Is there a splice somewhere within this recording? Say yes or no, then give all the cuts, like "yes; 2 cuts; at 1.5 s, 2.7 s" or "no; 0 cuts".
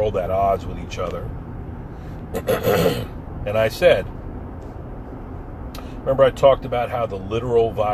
no; 0 cuts